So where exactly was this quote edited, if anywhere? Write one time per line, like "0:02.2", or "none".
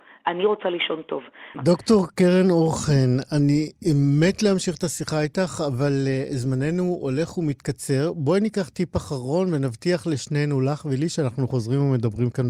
0:01.5